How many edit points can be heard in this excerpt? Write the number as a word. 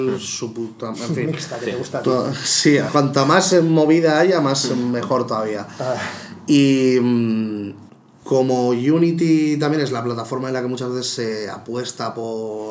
one